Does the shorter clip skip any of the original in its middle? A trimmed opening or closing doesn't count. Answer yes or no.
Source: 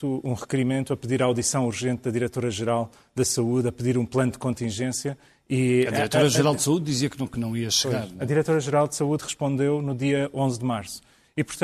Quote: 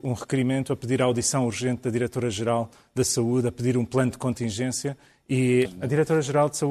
yes